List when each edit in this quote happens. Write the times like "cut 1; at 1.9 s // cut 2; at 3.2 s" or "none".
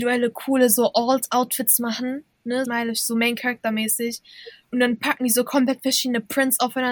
cut 1; at 2.6 s